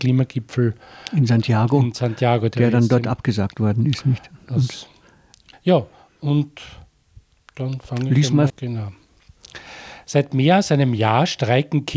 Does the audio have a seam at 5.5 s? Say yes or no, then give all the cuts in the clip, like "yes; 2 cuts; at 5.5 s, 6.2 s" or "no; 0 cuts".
yes; 2 cuts; at 5.5 s, 8.5 s